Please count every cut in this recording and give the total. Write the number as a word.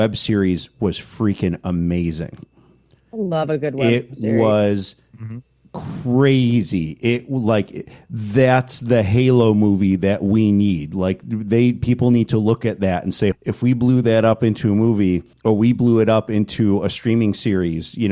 two